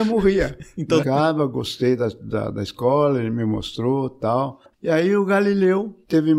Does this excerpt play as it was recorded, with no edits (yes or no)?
no